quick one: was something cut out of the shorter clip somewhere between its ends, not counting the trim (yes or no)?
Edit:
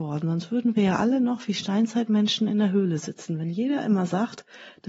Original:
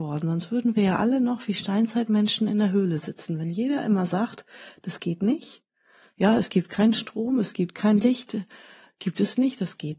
no